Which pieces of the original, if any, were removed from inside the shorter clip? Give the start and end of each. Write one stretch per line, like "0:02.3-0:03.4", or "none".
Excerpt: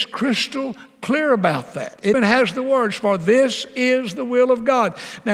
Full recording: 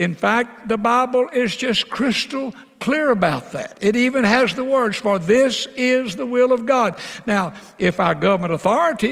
0:03.9-0:04.2